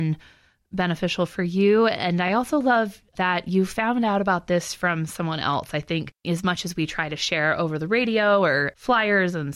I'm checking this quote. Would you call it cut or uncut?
uncut